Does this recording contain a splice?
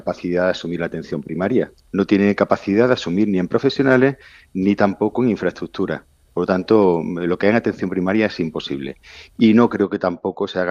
no; 0 cuts

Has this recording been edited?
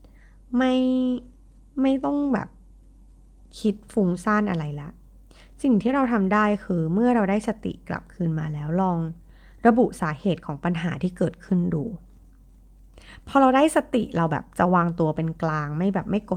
no; 0 cuts

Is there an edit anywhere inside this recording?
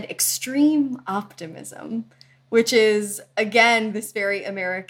no; 0 cuts

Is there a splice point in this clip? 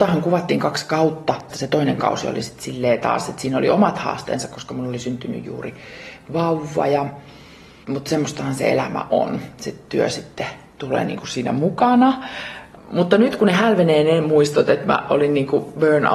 no; 0 cuts

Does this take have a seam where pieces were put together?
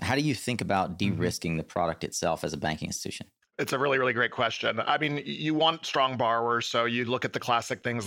no; 0 cuts

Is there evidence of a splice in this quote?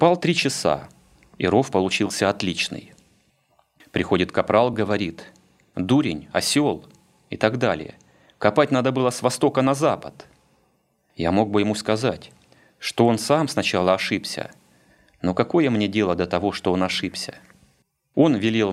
no; 0 cuts

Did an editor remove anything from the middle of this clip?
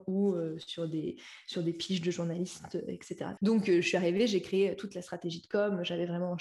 yes; 1 cut; at 3.4 s

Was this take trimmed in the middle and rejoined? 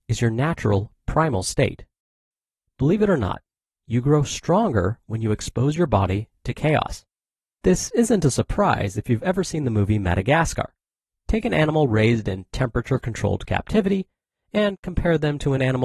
yes; 1 cut; at 7.4 s

